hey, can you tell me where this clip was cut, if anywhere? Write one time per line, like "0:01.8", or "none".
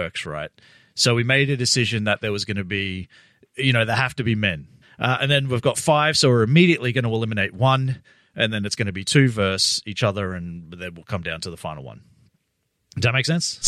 0:04.8